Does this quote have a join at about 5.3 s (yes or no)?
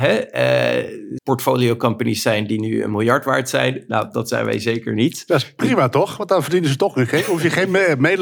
no